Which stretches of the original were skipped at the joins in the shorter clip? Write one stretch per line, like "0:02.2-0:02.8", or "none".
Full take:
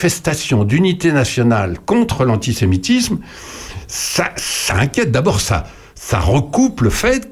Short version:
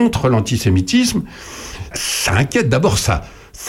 0:03.9-0:04.3